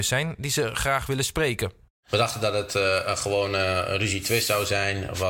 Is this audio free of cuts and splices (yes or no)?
yes